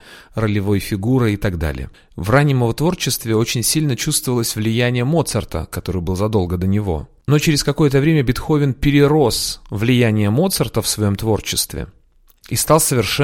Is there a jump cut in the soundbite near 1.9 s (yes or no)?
yes